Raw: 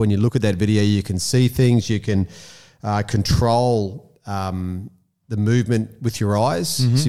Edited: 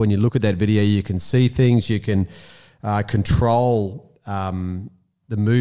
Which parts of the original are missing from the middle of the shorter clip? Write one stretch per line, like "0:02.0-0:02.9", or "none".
none